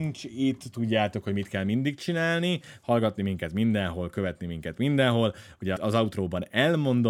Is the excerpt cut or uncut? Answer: cut